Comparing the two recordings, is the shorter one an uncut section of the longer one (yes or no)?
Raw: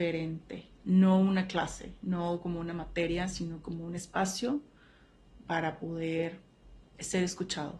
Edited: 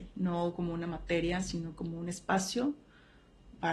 yes